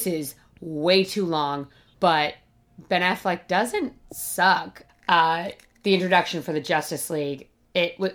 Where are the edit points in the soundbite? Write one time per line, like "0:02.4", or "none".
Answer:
0:01.9
0:04.9